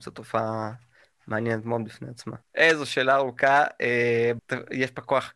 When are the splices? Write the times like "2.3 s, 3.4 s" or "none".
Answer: 2.4 s, 4.4 s